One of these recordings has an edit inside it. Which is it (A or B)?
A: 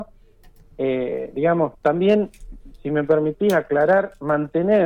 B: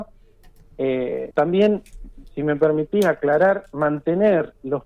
B